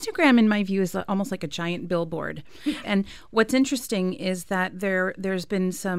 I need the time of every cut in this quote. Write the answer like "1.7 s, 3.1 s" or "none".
2.8 s